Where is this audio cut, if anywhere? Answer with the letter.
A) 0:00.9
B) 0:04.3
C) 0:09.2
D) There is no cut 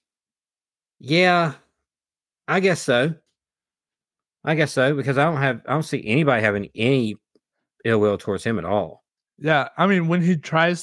D